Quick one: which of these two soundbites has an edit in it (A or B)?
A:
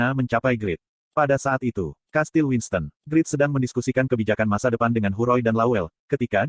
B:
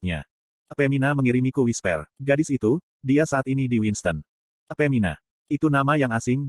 A